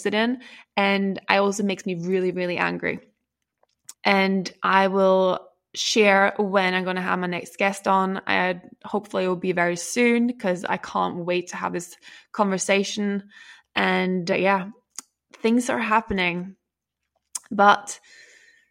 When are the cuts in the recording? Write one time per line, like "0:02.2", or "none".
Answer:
none